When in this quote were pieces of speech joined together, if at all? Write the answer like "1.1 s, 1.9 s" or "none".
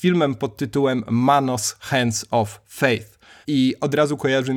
3.4 s